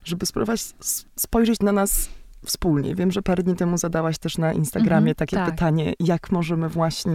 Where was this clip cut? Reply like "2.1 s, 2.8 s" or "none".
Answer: 1.1 s